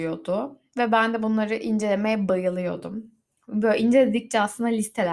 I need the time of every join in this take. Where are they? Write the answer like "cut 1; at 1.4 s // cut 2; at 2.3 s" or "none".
none